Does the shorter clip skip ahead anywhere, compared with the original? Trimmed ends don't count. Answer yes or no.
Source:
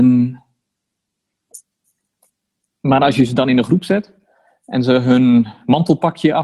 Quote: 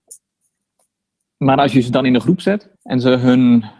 yes